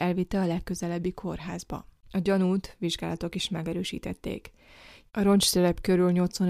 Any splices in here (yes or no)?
yes